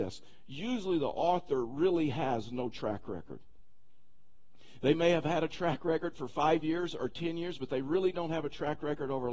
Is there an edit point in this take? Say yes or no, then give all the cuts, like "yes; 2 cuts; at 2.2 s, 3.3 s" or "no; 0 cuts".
no; 0 cuts